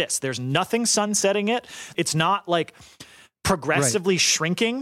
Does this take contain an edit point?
yes; 1 cut; at 1.9 s

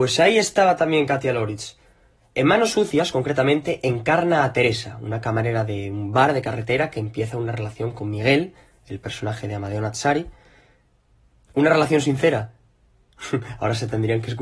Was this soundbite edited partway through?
no; 0 cuts

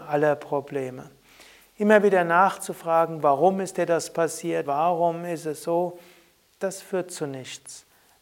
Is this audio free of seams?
no; 1 cut; at 4.6 s

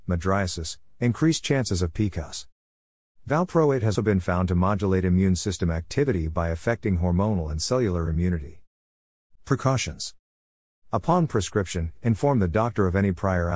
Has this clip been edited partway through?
yes; 2 cuts; at 3.9 s, 9.3 s

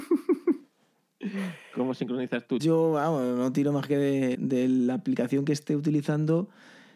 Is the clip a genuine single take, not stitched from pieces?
no; 2 cuts; at 2.6 s, 4.3 s

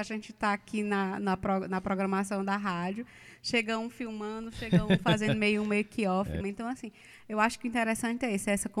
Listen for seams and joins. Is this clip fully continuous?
no; 1 cut; at 6.4 s

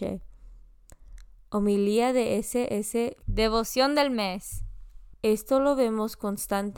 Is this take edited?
yes; 2 cuts; at 3.2 s, 5.1 s

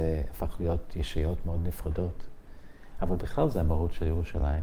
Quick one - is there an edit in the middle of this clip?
no; 0 cuts

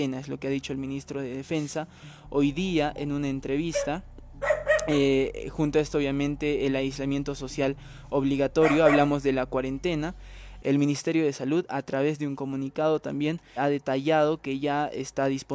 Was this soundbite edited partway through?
yes; 2 cuts; at 10.6 s, 13.6 s

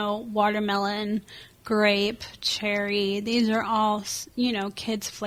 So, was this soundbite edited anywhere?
no; 0 cuts

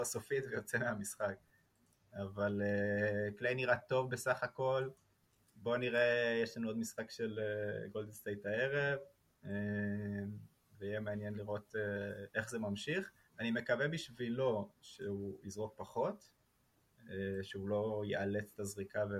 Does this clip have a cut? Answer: no; 0 cuts

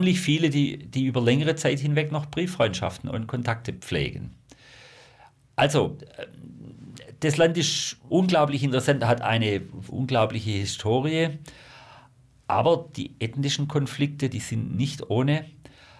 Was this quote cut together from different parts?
yes; 1 cut; at 14.3 s

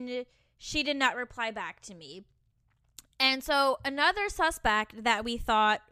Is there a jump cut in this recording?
no; 0 cuts

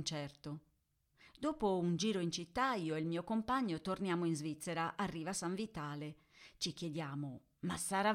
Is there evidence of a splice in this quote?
yes; 1 cut; at 1.2 s

